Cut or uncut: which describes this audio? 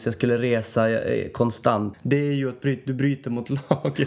cut